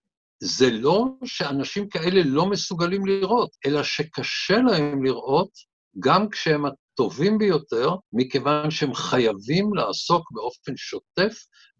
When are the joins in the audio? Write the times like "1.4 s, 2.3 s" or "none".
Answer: 3.6 s, 8.1 s